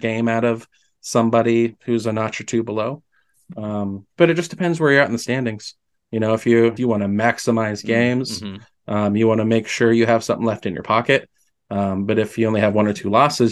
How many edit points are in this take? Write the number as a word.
one